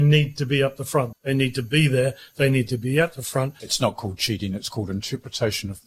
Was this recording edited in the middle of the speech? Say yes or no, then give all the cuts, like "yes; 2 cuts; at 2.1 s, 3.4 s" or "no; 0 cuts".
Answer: yes; 2 cuts; at 1.1 s, 3.6 s